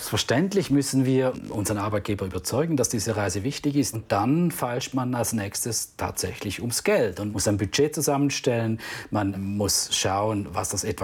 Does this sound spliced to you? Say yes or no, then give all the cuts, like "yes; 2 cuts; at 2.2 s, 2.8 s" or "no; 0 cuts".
yes; 3 cuts; at 3.9 s, 7.3 s, 9.3 s